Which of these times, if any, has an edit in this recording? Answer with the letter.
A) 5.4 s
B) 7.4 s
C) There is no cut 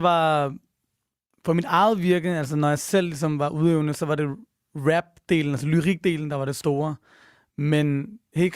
C